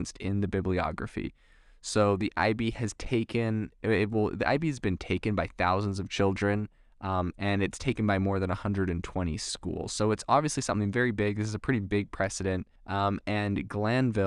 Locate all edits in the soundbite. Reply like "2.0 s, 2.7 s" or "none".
7.3 s, 12.8 s